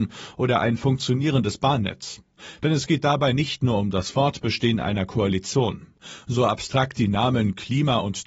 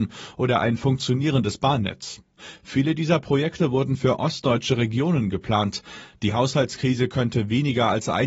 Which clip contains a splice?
first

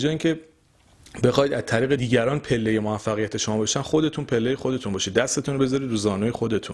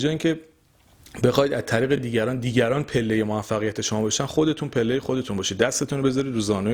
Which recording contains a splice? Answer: first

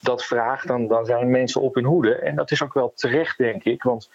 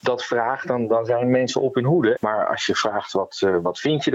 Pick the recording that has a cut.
second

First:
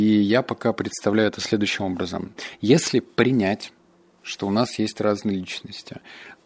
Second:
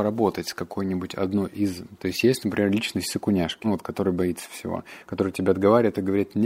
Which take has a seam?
second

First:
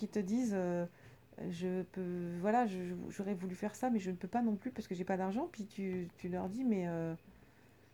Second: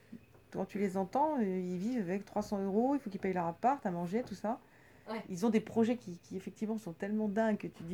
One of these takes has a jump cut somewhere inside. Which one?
second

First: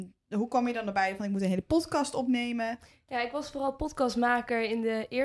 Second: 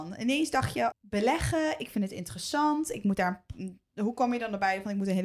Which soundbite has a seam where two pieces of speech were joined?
second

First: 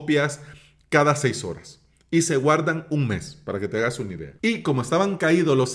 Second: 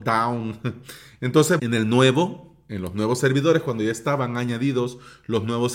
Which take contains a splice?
second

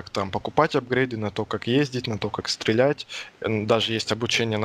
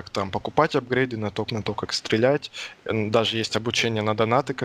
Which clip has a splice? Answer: second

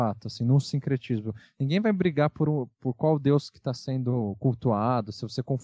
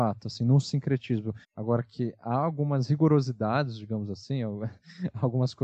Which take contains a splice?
second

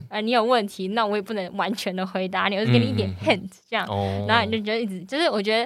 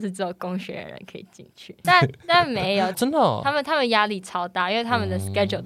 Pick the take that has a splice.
second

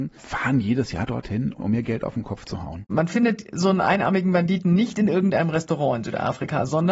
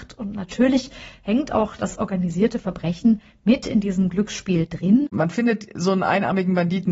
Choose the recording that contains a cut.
second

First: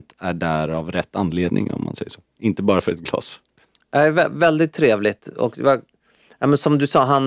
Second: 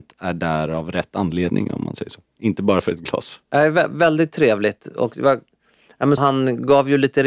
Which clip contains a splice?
second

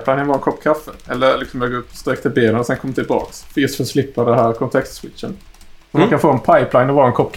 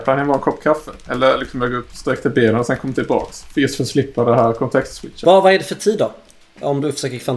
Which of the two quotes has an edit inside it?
second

